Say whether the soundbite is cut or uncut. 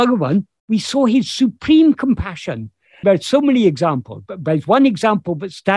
cut